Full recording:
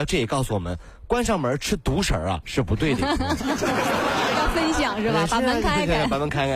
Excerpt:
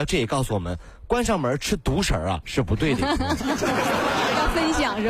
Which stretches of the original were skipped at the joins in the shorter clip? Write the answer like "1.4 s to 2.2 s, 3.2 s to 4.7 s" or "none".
none